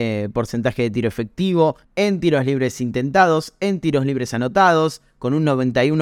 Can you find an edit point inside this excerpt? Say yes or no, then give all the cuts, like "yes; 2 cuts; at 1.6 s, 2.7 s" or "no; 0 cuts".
yes; 1 cut; at 1.8 s